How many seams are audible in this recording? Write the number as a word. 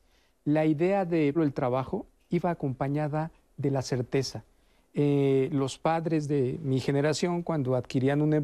one